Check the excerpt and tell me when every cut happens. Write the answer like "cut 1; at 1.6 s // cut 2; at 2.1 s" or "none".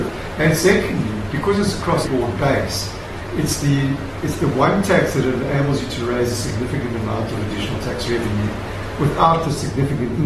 cut 1; at 2.0 s